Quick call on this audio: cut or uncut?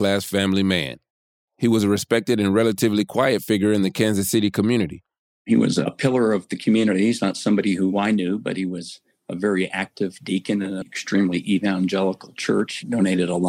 cut